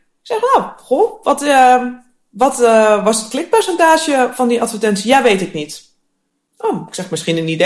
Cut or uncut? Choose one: uncut